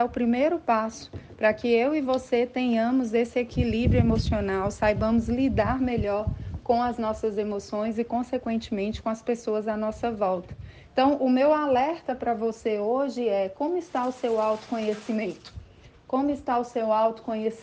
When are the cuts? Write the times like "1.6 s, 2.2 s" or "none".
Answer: none